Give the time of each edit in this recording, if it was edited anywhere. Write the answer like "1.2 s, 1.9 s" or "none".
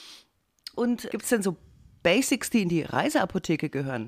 1.1 s